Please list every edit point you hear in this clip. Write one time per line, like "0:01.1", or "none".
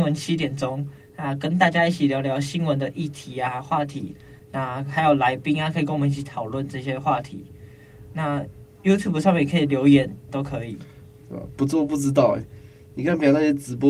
0:10.3
0:12.4